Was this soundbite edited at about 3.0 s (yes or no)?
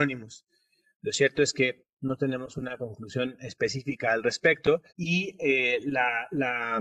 no